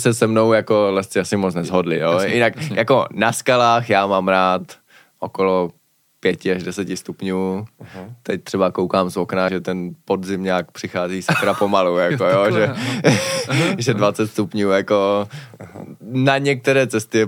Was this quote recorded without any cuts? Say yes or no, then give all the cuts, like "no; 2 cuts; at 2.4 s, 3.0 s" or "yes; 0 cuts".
no; 1 cut; at 9.5 s